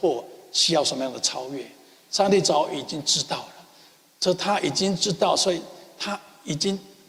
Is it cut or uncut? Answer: uncut